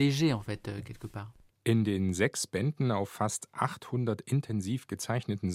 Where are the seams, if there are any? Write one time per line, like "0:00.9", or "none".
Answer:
none